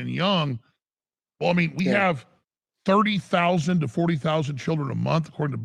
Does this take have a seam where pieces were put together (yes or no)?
yes